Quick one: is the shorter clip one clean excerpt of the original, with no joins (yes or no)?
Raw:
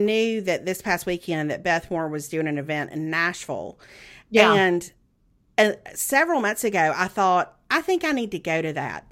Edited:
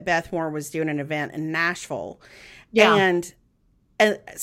yes